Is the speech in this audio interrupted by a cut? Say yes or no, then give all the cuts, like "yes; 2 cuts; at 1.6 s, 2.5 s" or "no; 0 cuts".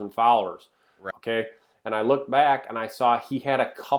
yes; 1 cut; at 1.1 s